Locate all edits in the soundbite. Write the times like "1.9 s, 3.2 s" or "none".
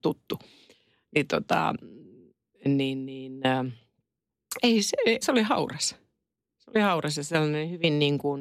5.2 s

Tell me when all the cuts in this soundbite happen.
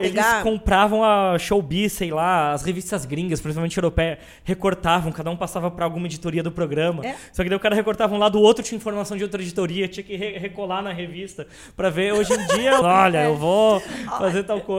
12.8 s

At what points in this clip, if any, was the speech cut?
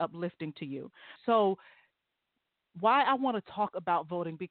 1.2 s

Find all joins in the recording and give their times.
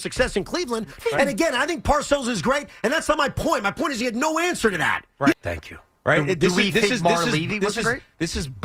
1.0 s, 5.3 s

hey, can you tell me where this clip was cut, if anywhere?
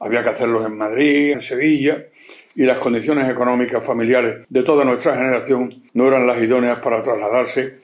1.3 s, 4.4 s, 5.9 s

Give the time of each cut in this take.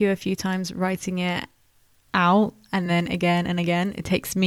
none

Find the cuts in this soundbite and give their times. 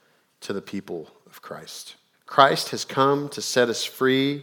2.1 s

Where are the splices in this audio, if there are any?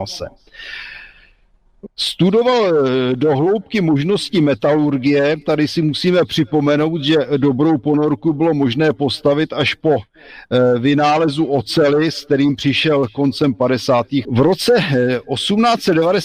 1.9 s, 14.2 s

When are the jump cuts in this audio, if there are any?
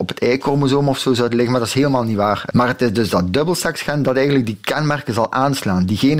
2.5 s

